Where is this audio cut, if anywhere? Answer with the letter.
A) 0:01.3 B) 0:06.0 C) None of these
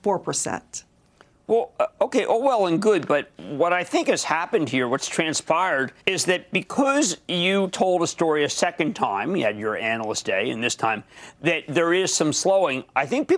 B